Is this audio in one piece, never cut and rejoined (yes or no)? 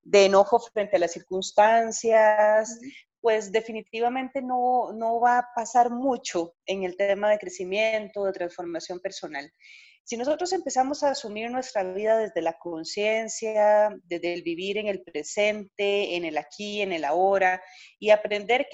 yes